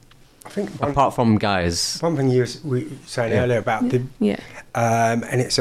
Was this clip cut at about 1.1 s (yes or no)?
no